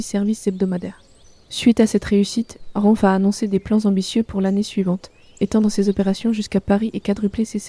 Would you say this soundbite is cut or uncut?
uncut